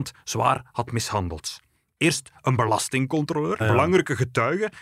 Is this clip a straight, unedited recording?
no; 1 cut; at 3.6 s

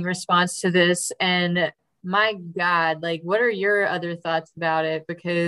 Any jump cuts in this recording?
no; 0 cuts

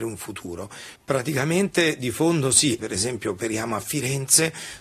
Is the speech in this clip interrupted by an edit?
yes; 2 cuts; at 0.9 s, 2.8 s

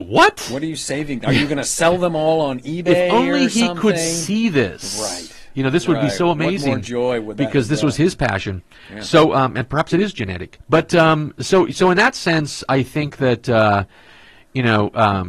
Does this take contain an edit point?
no; 0 cuts

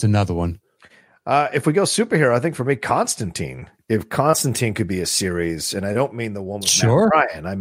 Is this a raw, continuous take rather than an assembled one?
yes; 0 cuts

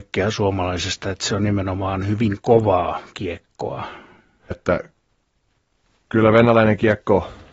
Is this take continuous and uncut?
no; 1 cut; at 4.5 s

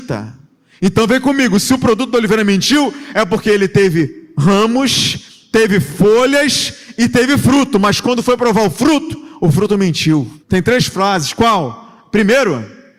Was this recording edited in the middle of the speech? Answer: yes; 1 cut; at 10.4 s

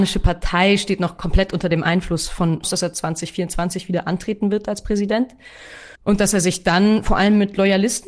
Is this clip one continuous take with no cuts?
no; 2 cuts; at 2.6 s, 6.0 s

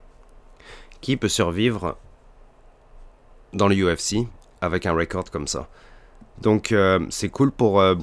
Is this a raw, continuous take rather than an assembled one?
no; 1 cut; at 6.3 s

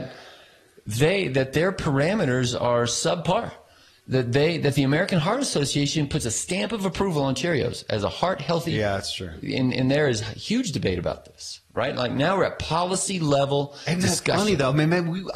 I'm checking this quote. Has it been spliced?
no; 0 cuts

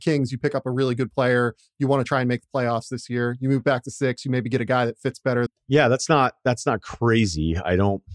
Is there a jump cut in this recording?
yes; 1 cut; at 5.5 s

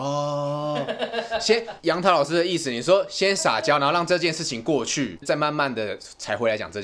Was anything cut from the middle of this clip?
yes; 1 cut; at 5.2 s

